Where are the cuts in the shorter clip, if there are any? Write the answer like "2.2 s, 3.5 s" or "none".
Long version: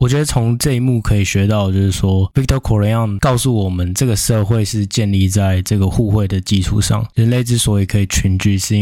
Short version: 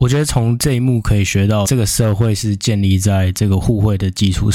1.6 s